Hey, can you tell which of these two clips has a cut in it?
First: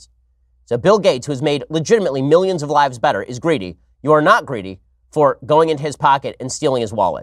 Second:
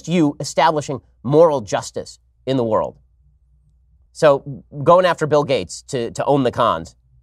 second; 1 cut; at 4.1 s

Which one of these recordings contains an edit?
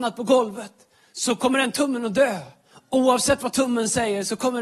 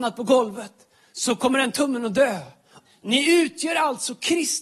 second; 1 cut; at 2.9 s

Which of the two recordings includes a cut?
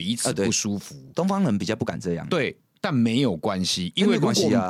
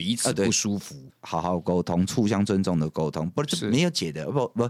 second; 1 cut; at 1.1 s

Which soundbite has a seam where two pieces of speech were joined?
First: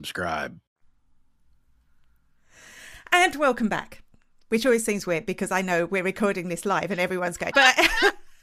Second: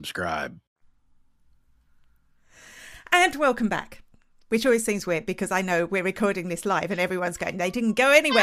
first; 1 cut; at 7.5 s

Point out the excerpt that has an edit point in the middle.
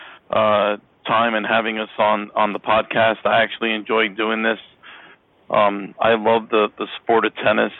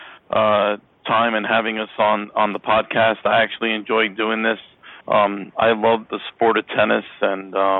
second; 2 cuts; at 5.0 s, 6.1 s

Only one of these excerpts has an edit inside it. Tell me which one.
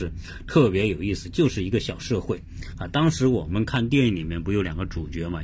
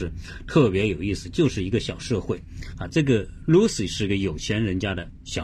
second; 1 cut; at 2.9 s

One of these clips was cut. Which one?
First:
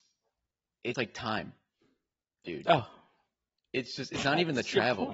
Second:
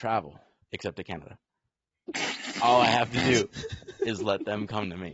first; 1 cut; at 0.9 s

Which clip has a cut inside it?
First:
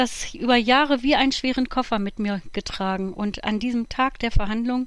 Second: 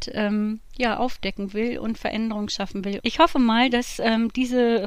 second; 1 cut; at 3.0 s

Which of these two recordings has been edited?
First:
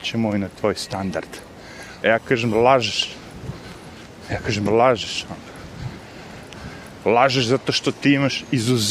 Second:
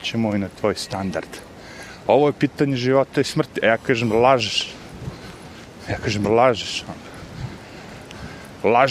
first; 1 cut; at 2.0 s

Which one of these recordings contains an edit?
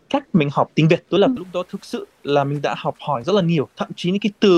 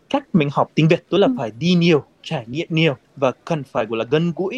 first; 1 cut; at 1.4 s

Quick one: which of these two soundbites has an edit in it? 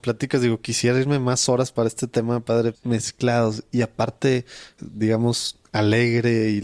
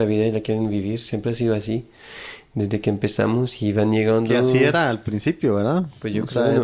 first; 2 cuts; at 2.7 s, 4.8 s

